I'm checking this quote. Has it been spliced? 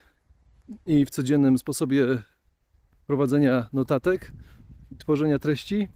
no; 0 cuts

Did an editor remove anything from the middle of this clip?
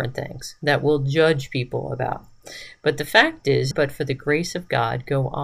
yes; 1 cut; at 3.7 s

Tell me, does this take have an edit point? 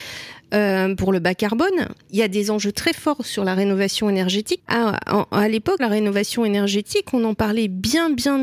yes; 2 cuts; at 4.6 s, 5.8 s

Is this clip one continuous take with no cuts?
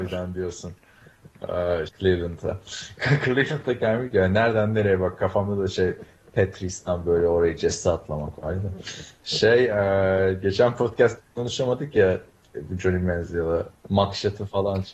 no; 2 cuts; at 1.9 s, 13.8 s

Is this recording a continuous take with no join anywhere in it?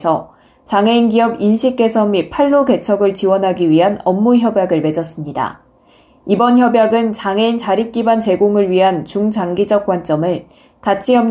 yes; 0 cuts

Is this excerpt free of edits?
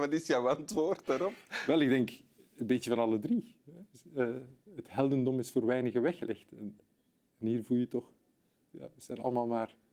yes; 0 cuts

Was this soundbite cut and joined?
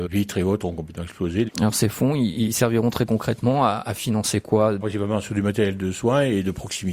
yes; 1 cut; at 1.5 s

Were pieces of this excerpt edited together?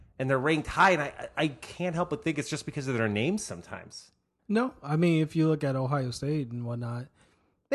yes; 1 cut; at 4.4 s

